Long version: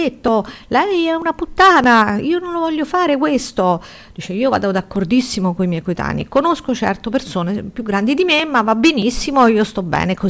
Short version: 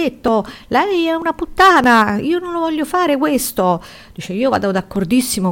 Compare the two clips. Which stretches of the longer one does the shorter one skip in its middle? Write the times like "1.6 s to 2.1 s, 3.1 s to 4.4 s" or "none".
none